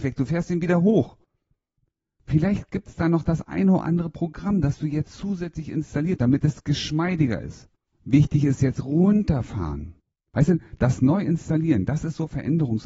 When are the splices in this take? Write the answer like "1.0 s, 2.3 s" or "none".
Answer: 6.2 s, 7.9 s, 10.3 s

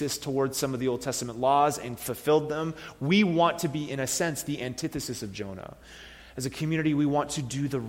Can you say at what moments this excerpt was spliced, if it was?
none

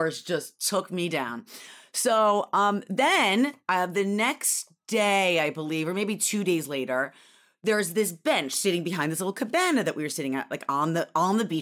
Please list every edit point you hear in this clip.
none

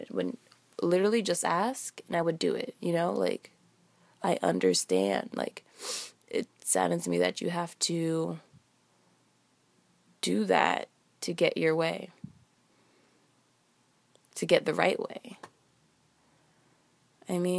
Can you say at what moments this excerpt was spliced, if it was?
none

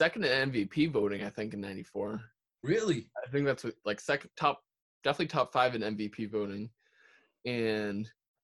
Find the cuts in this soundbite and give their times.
4.3 s

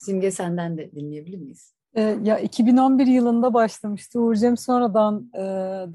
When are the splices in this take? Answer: 1.8 s

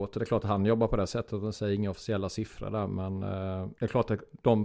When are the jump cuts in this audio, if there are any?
3.8 s

